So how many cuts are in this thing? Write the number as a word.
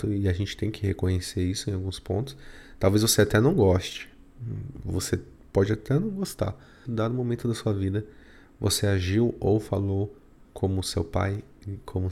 one